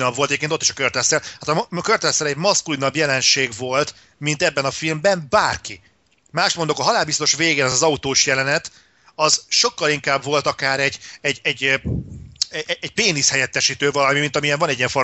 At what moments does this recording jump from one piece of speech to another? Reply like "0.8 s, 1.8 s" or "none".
none